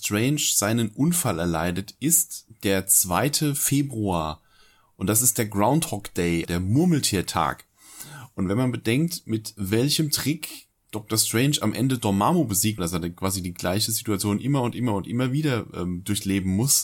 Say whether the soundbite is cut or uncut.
cut